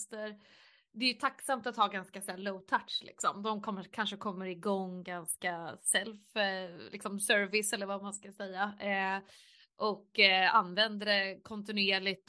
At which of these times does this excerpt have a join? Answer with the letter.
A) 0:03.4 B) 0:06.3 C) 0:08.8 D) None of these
D